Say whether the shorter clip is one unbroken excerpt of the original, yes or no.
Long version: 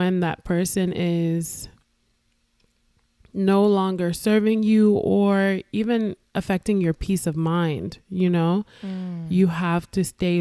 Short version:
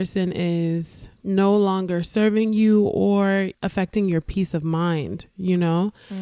no